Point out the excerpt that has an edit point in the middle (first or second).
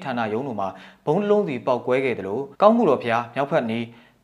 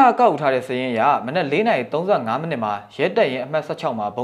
first